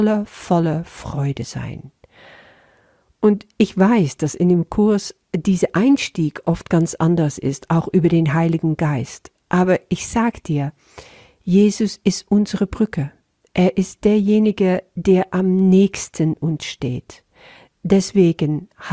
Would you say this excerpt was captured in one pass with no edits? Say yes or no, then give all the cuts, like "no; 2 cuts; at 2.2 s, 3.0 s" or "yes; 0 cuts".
yes; 0 cuts